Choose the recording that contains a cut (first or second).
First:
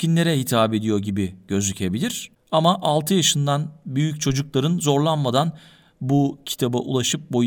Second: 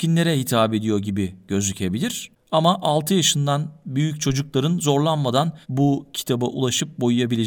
second